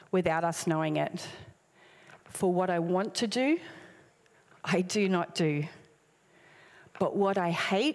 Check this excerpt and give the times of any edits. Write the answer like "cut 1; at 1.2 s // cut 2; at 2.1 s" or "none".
cut 1; at 2.2 s